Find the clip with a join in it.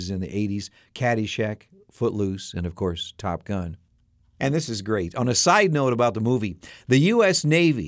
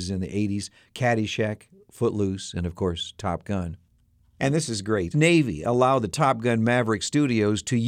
second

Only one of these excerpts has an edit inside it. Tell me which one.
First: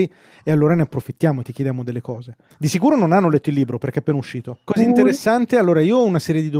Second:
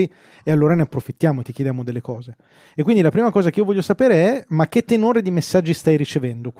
first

